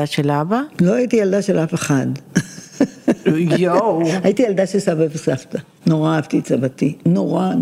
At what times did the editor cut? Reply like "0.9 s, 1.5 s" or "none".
none

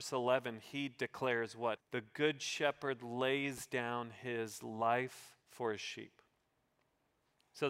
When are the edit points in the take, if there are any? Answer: 1.8 s, 5.4 s

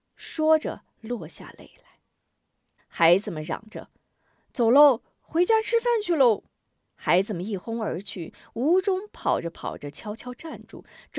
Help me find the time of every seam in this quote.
2.8 s

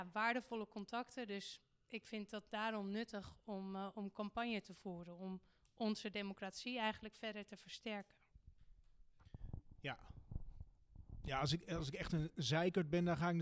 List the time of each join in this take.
none

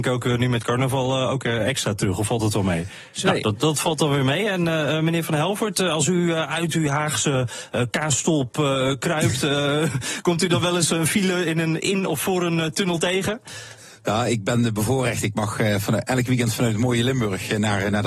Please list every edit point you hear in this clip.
3.2 s

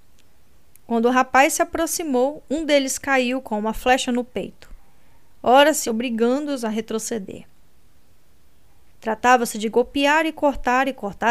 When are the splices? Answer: 5.8 s, 8.9 s

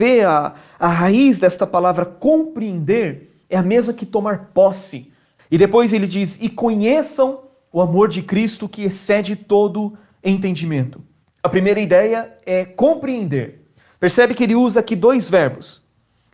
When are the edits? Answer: 5.4 s, 11.2 s

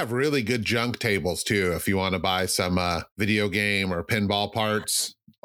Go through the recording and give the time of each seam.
3.1 s

